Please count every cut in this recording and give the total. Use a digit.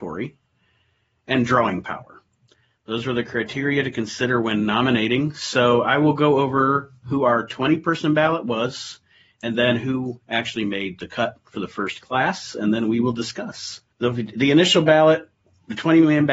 1